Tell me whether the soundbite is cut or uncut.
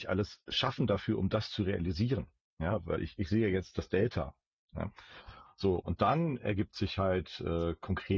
uncut